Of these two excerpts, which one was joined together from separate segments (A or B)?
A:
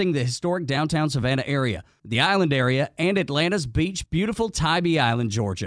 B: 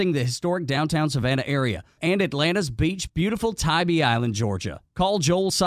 B